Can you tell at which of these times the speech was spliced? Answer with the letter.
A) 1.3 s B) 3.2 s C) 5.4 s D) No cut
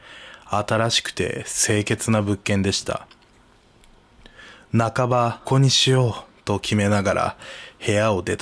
C